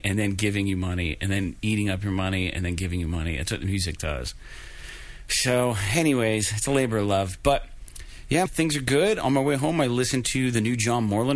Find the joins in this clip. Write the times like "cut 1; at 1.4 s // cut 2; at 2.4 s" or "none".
cut 1; at 8.5 s